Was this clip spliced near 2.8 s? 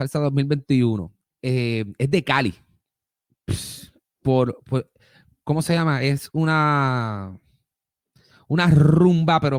no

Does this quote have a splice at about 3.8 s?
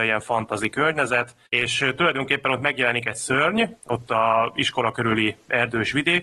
no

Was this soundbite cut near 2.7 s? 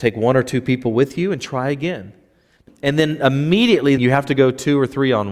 yes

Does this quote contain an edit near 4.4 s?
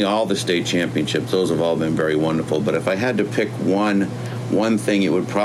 no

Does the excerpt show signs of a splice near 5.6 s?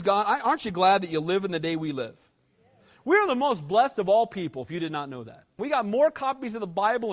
yes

